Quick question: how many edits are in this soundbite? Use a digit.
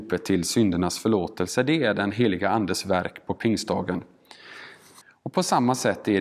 1